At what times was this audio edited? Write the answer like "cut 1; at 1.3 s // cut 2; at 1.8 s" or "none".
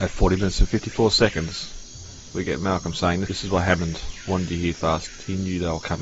cut 1; at 4.7 s

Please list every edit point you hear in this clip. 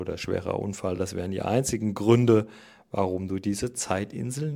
none

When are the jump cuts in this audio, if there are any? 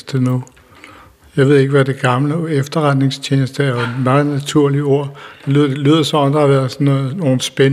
none

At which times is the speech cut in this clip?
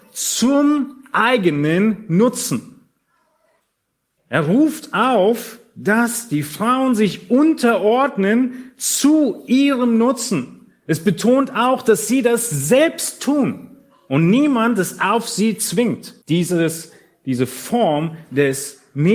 cut 1; at 4.2 s // cut 2; at 16.2 s

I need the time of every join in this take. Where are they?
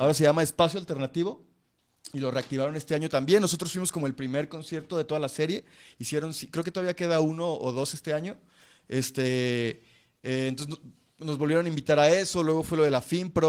none

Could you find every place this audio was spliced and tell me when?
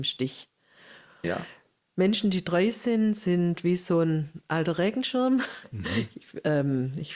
cut 1; at 1.2 s // cut 2; at 5.6 s

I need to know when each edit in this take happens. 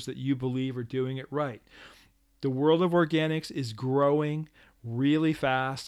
none

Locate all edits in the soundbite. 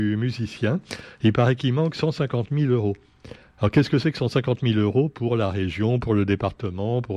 none

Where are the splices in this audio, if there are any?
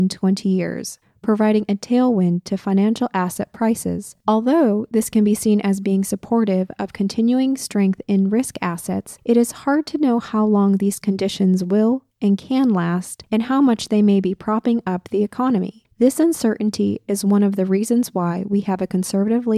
none

